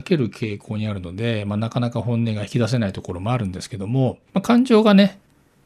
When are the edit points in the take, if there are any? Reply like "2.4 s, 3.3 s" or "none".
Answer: 4.3 s